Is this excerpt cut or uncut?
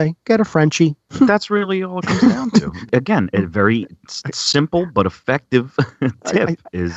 uncut